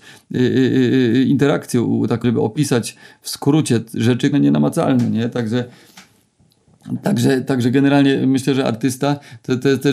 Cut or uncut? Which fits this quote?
cut